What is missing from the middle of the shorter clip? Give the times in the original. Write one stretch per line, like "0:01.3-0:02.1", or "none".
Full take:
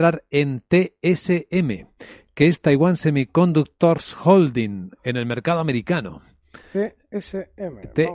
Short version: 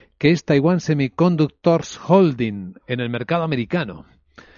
none